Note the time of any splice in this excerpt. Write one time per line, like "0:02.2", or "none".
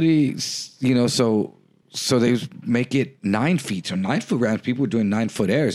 none